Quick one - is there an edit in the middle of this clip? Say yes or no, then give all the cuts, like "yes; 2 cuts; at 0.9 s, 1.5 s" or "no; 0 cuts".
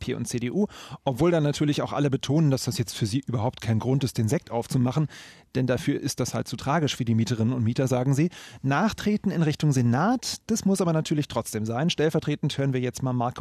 no; 0 cuts